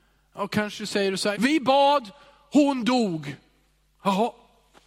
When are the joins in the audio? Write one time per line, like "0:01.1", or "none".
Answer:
0:01.4